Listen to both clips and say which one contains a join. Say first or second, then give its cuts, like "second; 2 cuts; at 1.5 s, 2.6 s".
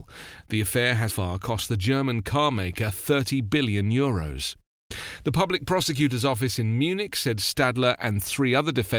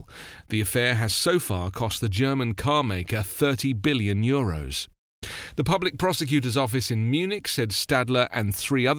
first; 1 cut; at 1.1 s